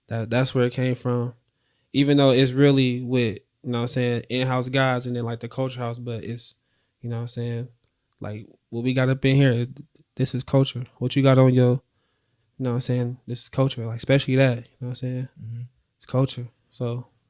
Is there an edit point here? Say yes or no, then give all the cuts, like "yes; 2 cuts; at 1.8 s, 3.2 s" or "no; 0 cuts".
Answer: no; 0 cuts